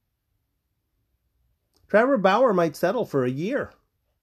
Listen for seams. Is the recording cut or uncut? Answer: uncut